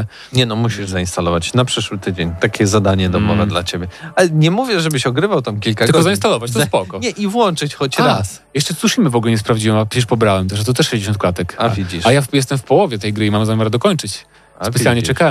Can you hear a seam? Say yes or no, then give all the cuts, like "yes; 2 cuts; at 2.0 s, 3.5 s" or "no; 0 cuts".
no; 0 cuts